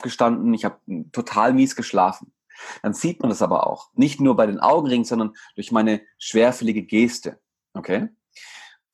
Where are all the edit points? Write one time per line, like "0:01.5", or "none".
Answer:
none